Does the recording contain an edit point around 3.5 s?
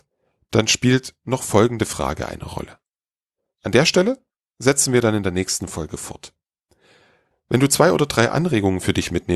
yes; 2 cuts; at 3.5 s, 7.3 s

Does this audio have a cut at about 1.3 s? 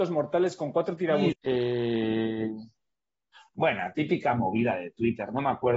yes; 1 cut; at 1.3 s

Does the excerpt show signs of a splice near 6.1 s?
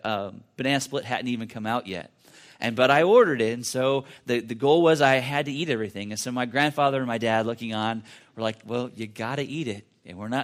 no; 1 cut; at 8.2 s

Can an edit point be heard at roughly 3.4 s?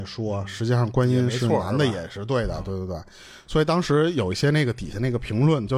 no; 0 cuts

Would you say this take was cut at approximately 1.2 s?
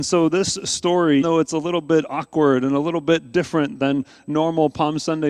yes; 1 cut; at 1.2 s

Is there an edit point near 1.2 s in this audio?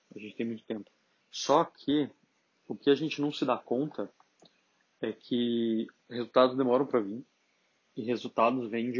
yes; 2 cuts; at 1.2 s, 6.0 s

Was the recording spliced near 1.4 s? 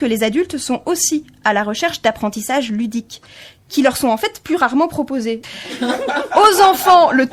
no; 1 cut; at 5.4 s

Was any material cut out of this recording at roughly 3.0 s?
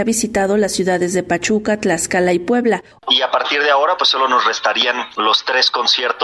yes; 1 cut; at 3.0 s

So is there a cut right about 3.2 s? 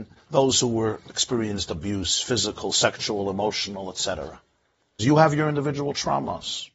no; 1 cut; at 5.0 s

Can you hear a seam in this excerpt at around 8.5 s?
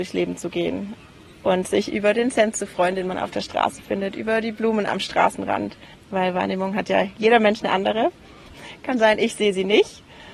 yes; 2 cuts; at 5.9 s, 8.5 s

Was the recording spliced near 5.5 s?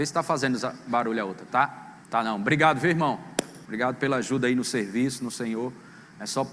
no; 2 cuts; at 2.0 s, 3.7 s

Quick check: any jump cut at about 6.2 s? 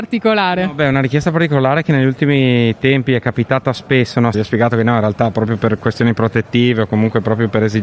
no; 1 cut; at 4.3 s

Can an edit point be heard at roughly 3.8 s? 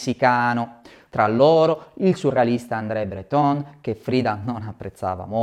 no; 1 cut; at 1.1 s

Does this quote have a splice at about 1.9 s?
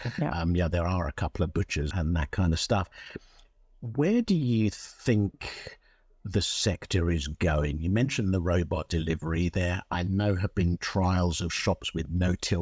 yes; 1 cut; at 1.9 s

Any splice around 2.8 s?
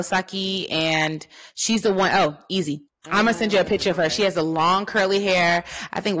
yes; 1 cut; at 2.8 s

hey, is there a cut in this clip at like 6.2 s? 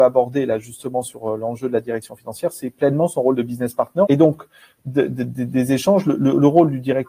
no; 1 cut; at 4.1 s

